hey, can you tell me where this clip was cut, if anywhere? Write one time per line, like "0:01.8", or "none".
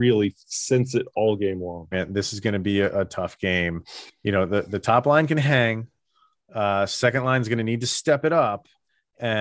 0:01.9

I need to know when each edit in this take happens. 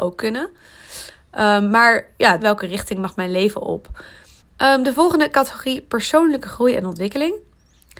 0:02.4
0:04.4

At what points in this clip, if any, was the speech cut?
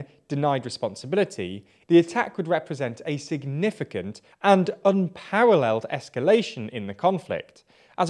0:01.8

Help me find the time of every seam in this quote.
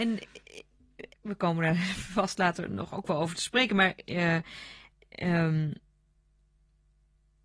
0:01.1

